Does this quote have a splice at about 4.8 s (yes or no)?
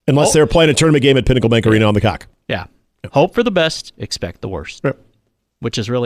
no